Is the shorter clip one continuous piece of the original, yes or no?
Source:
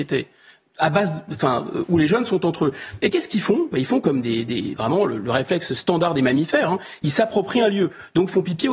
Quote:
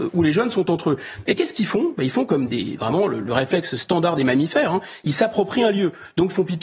no